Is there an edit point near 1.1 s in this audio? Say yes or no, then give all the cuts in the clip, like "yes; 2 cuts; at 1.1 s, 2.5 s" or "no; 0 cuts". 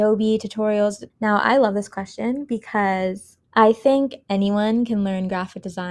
yes; 2 cuts; at 1.1 s, 3.4 s